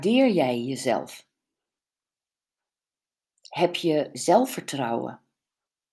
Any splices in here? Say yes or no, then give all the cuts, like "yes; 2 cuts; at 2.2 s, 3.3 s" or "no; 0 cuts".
no; 0 cuts